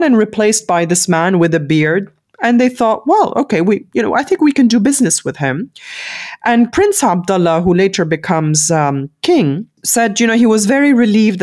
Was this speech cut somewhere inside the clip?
no; 0 cuts

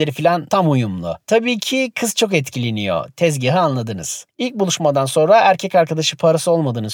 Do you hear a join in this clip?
no; 0 cuts

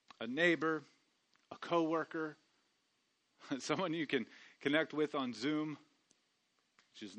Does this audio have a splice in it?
no; 0 cuts

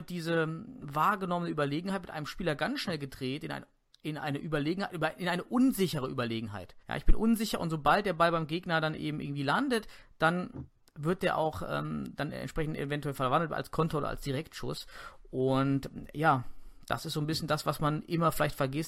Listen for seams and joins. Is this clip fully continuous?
no; 1 cut; at 6.8 s

